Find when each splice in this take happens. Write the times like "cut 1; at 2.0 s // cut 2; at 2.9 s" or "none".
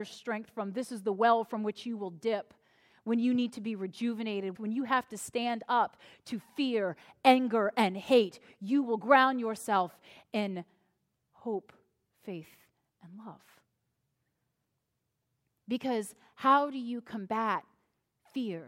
cut 1; at 4.5 s